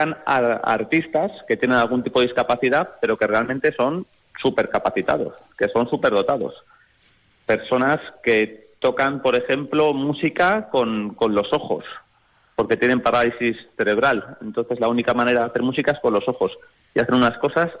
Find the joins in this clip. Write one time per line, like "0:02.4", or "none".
none